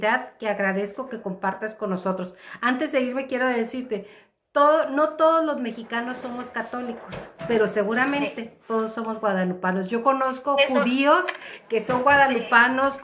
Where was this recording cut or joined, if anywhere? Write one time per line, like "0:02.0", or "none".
none